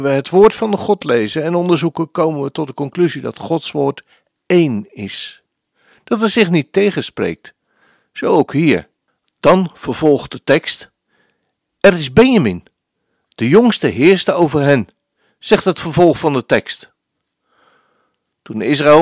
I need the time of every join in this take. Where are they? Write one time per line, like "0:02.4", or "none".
none

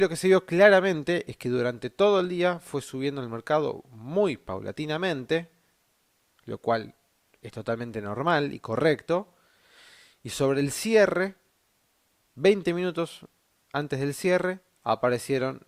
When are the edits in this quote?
none

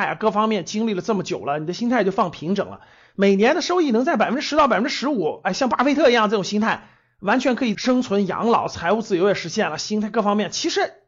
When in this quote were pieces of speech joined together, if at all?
none

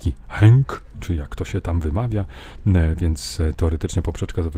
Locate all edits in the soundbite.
0:00.9

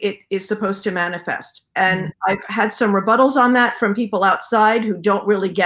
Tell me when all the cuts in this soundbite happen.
none

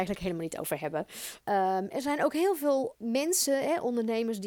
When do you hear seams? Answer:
0:01.4
0:03.0

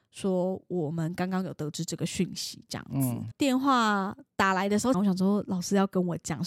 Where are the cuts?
0:03.3
0:04.9

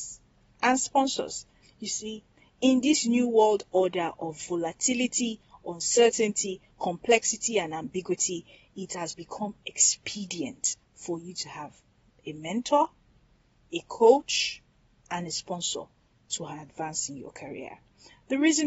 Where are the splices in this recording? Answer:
0:01.6

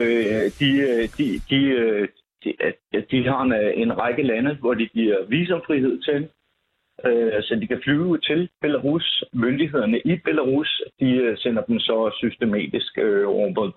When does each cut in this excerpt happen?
0:09.3

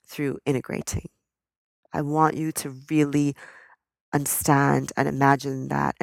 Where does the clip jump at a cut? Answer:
0:01.8

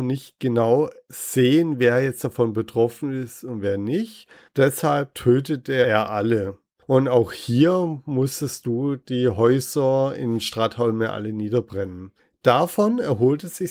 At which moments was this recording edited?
0:06.8

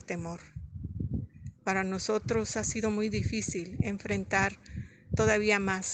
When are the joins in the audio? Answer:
0:01.6

